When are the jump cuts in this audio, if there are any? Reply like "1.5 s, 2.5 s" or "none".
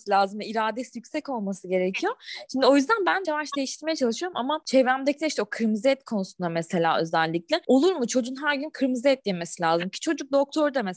3.2 s